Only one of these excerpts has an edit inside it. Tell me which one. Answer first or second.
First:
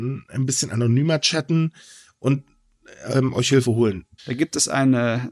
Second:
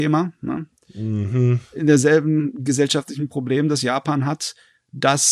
first